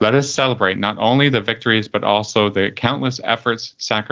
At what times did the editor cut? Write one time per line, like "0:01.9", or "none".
none

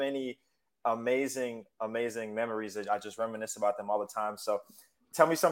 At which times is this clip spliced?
none

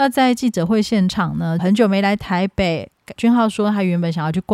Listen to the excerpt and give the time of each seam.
0:01.6
0:03.2

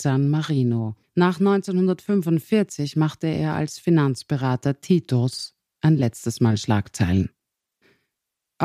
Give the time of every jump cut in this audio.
none

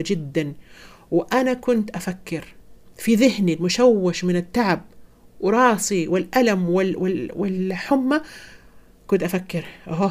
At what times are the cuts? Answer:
none

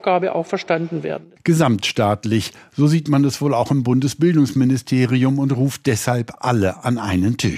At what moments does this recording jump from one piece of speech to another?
none

